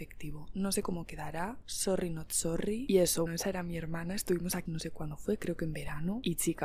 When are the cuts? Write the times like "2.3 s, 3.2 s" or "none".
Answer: 3.3 s, 4.7 s